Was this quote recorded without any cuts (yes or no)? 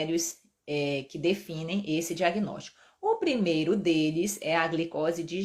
yes